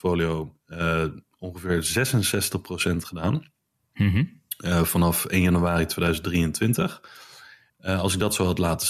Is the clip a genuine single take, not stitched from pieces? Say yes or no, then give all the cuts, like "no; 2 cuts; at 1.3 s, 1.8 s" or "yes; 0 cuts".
no; 1 cut; at 7.7 s